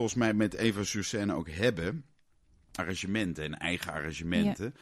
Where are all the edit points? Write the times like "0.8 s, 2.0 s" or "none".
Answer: 2.8 s